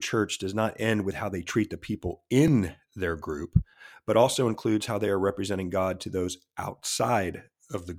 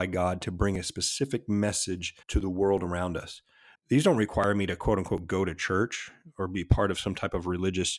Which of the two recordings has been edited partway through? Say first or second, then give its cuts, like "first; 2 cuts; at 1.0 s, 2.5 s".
second; 2 cuts; at 2.2 s, 3.7 s